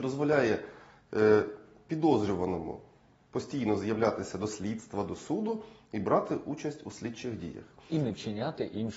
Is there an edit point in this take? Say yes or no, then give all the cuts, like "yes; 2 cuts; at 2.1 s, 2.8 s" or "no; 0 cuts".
no; 0 cuts